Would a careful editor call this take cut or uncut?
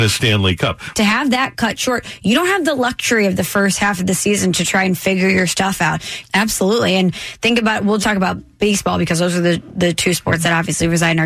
cut